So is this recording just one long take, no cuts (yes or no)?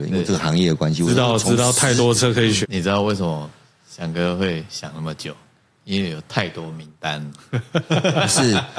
no